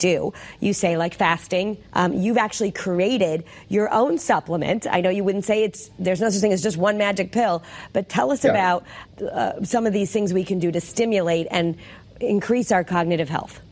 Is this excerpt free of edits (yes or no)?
no